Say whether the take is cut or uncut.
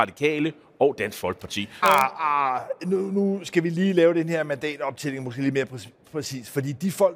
cut